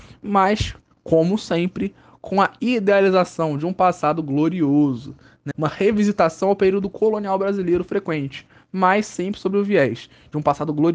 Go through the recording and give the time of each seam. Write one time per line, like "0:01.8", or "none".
0:05.5